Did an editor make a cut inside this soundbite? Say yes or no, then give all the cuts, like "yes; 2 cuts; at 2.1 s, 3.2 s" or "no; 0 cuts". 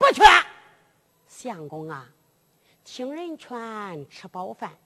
yes; 1 cut; at 1.1 s